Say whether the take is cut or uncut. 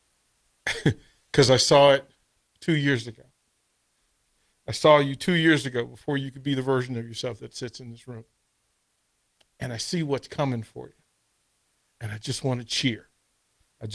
uncut